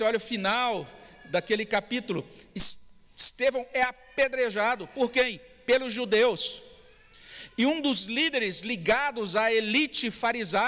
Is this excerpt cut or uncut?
uncut